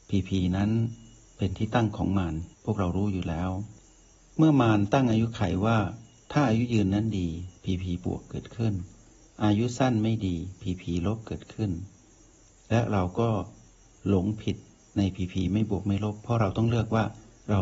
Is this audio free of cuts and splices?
no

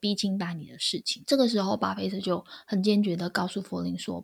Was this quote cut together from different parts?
no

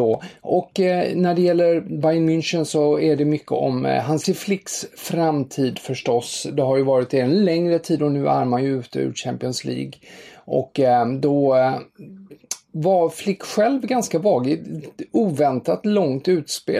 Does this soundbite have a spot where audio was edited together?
no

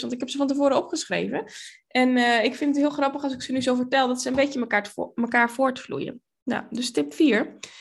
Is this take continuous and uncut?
yes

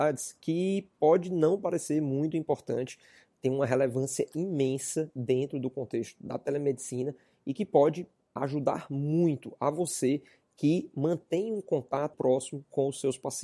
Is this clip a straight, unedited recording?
no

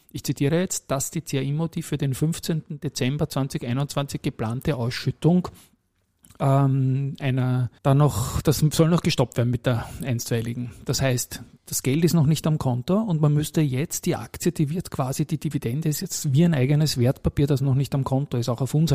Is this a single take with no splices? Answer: no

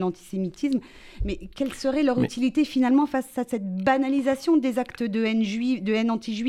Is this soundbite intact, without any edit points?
yes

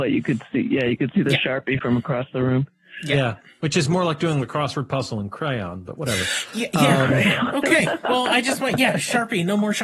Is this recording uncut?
yes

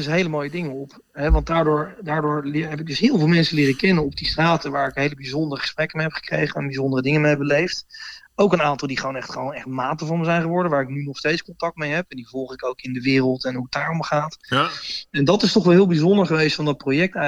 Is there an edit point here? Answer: no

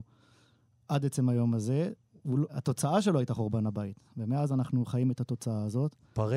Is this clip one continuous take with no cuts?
no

